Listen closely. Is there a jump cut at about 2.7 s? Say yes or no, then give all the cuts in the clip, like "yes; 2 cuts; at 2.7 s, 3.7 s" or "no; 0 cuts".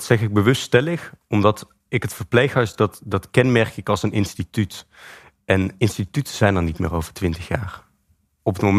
no; 0 cuts